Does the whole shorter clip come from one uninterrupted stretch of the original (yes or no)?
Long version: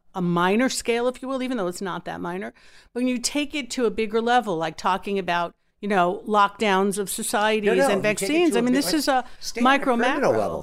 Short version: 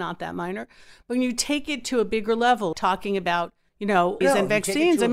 no